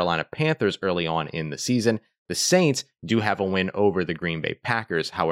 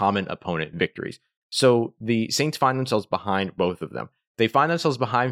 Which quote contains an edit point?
second; 1 cut; at 1.4 s

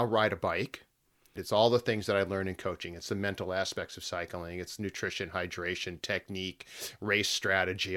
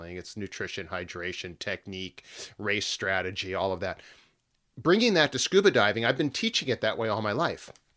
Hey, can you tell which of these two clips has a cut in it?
first; 1 cut; at 1.4 s

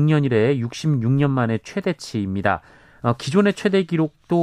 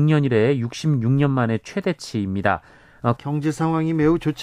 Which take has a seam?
second; 1 cut; at 3.2 s

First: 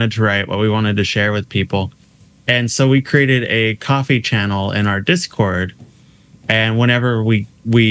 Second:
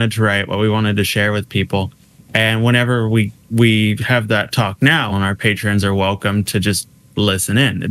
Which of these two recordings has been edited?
second; 2 cuts; at 2.2 s, 5.1 s

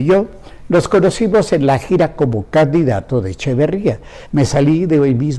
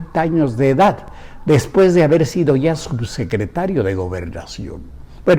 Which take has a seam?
first; 1 cut; at 4.3 s

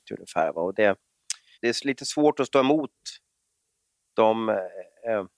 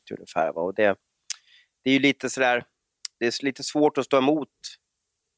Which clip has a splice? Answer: first; 1 cut; at 1.5 s

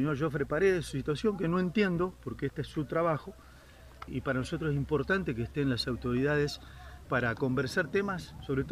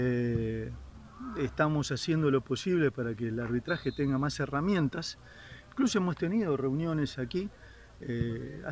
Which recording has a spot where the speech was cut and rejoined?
first; 2 cuts; at 4.1 s, 7.0 s

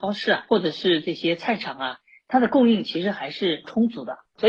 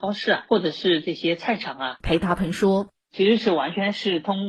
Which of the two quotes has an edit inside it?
second; 1 cut; at 2.0 s

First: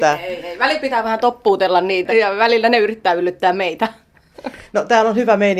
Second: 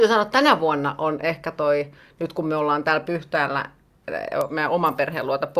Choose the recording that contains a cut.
first; 1 cut; at 2.1 s

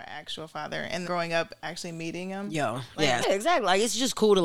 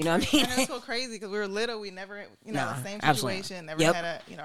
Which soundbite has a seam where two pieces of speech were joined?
first; 2 cuts; at 1.0 s, 3.2 s

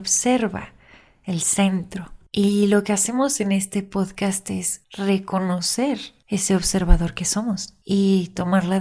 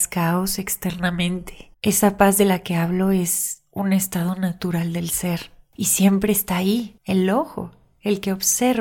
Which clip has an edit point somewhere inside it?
second; 2 cuts; at 1.7 s, 7.0 s

